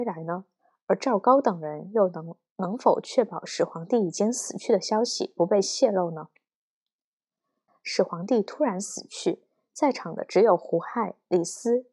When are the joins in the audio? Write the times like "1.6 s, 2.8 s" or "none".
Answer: 7.7 s

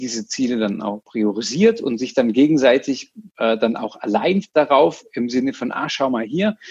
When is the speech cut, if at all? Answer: none

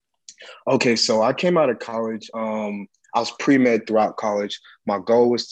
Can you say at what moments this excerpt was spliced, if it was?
none

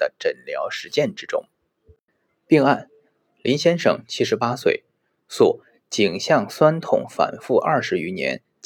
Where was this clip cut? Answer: none

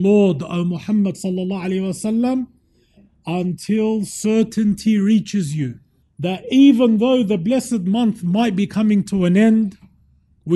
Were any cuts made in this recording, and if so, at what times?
6.0 s

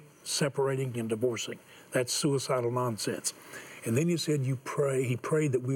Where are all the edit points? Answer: 0.9 s

